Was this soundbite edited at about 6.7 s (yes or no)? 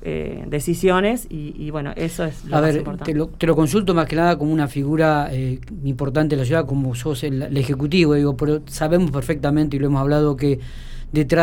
yes